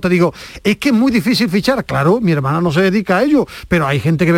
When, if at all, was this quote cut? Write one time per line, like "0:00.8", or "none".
none